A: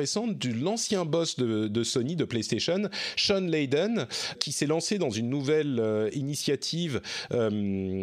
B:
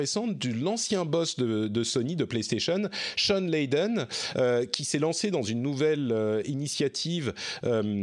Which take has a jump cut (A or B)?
A